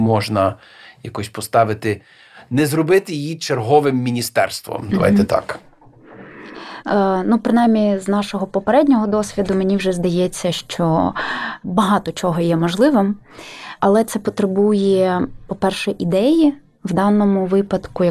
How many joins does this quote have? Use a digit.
1